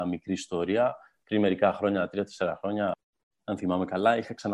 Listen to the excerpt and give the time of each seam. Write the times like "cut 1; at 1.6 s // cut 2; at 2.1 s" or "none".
none